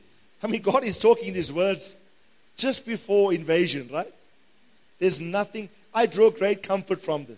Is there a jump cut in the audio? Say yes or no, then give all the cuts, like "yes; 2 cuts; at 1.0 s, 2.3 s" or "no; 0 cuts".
no; 0 cuts